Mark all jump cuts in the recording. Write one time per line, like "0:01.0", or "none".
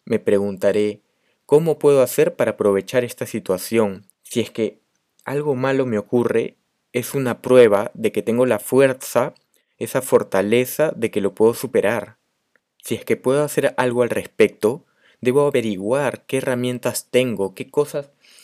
0:04.1